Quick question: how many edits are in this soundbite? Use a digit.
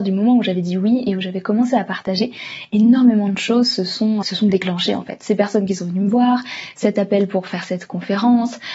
1